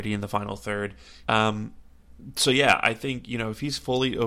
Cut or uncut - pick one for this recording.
cut